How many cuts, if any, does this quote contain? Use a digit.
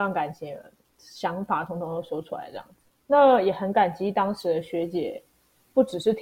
0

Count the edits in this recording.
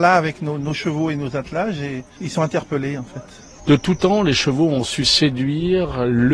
0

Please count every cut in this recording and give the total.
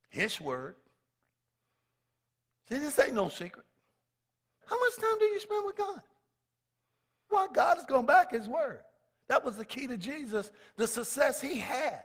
2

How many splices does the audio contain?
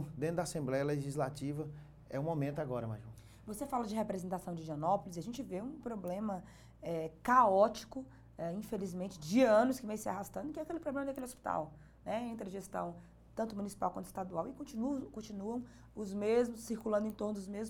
0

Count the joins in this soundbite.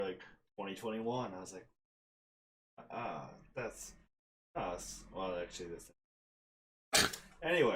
0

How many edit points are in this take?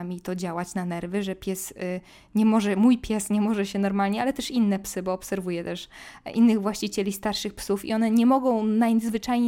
0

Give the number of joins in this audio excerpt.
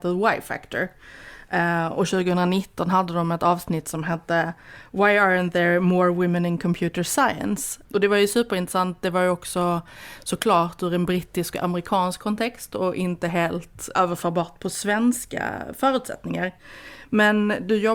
2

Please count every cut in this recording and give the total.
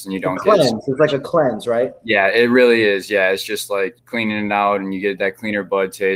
1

